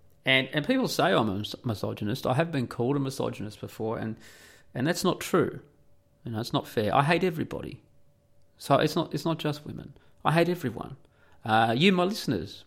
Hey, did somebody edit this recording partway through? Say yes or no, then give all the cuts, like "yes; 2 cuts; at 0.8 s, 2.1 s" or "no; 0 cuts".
no; 0 cuts